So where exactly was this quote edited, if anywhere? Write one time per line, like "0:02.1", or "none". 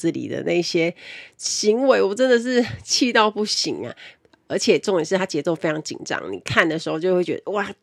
none